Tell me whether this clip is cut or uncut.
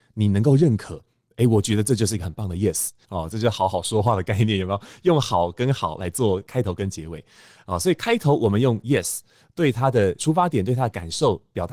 cut